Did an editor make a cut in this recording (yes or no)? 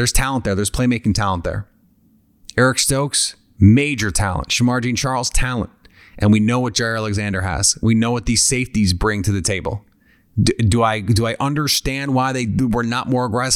no